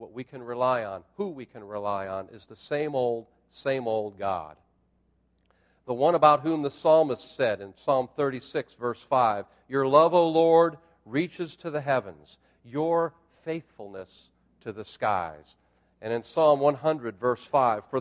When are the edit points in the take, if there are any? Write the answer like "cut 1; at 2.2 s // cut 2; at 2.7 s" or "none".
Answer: none